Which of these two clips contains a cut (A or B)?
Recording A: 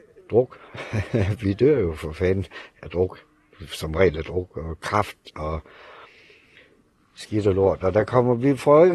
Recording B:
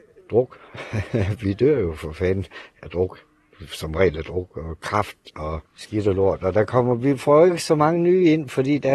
B